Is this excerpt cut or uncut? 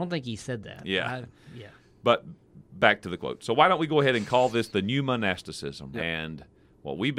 cut